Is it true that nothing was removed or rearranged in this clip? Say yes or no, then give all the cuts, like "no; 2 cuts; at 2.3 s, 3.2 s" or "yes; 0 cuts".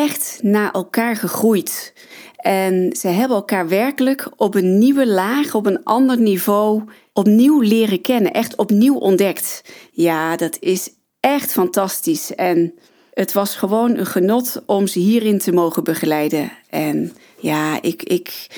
yes; 0 cuts